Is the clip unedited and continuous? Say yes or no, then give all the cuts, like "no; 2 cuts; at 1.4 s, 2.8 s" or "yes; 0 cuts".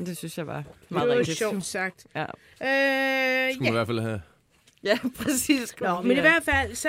yes; 0 cuts